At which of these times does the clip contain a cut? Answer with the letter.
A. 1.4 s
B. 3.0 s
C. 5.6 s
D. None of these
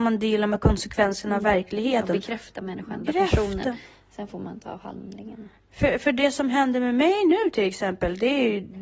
B